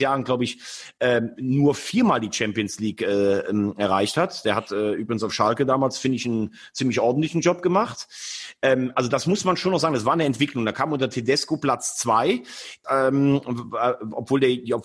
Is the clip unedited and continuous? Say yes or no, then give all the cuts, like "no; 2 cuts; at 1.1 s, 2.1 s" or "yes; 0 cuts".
no; 1 cut; at 12.8 s